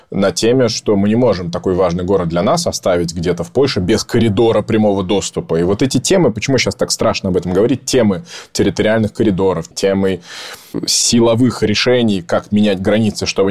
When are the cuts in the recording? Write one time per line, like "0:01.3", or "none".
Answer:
0:09.7